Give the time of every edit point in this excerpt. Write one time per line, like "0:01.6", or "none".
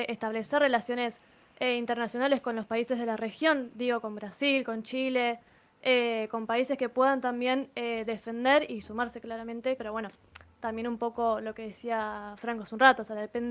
0:09.8